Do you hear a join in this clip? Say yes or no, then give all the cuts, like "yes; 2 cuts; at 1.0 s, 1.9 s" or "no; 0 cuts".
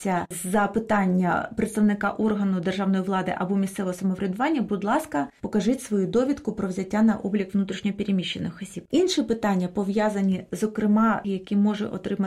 yes; 1 cut; at 11.2 s